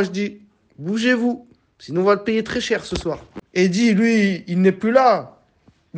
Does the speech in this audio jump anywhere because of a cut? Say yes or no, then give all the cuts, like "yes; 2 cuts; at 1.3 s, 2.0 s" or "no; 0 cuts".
yes; 1 cut; at 3.4 s